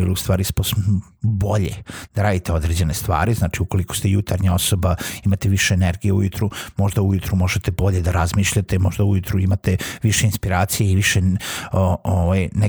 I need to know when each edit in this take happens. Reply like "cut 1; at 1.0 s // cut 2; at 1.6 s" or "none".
none